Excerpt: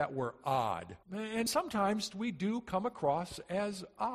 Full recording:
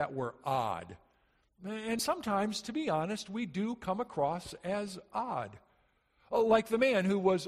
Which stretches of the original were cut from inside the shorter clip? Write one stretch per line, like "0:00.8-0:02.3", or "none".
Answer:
0:01.0-0:01.5
0:02.6-0:03.2